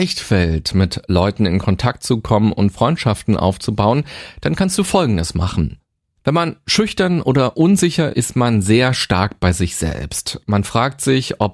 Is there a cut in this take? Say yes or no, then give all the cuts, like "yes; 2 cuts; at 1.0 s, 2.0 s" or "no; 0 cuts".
yes; 1 cut; at 8.1 s